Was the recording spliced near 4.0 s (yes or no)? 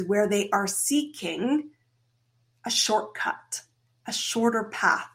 no